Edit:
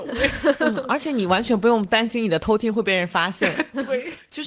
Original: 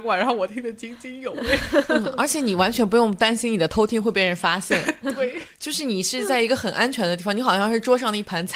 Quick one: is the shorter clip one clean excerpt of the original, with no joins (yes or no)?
yes